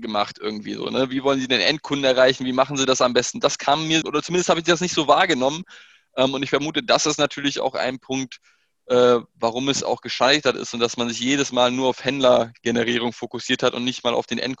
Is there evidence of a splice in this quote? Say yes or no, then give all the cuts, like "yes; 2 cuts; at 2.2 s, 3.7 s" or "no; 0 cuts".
yes; 1 cut; at 4.0 s